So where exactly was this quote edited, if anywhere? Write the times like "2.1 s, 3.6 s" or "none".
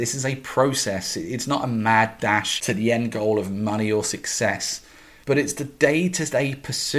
none

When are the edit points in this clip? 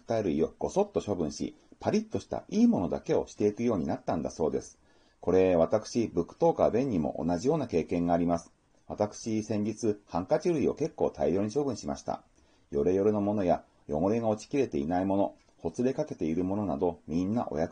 none

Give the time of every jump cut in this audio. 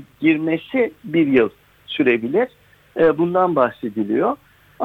none

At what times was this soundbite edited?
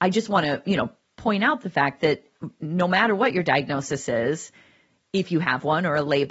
none

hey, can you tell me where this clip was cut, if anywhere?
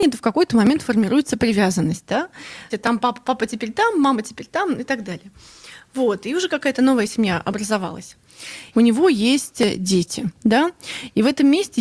2.7 s, 8.7 s

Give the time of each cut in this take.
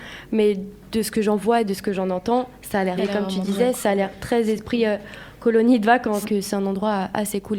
3.0 s, 6.2 s

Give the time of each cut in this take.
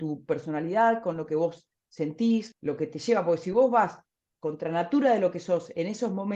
2.5 s

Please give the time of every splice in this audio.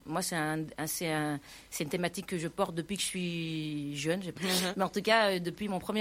4.4 s

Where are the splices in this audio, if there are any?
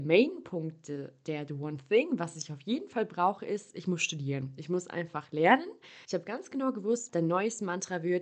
6.0 s, 7.1 s

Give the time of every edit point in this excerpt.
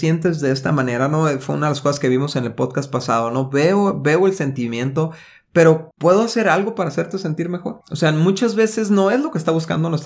none

